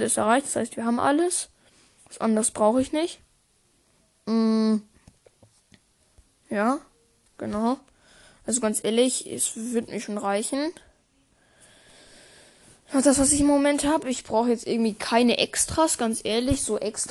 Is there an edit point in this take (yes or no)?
no